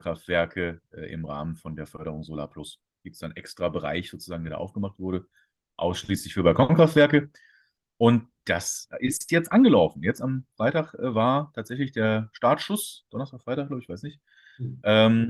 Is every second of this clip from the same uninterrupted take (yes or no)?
yes